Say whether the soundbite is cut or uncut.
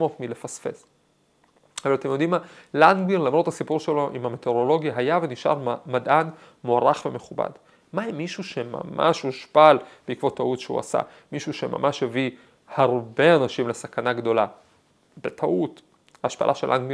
uncut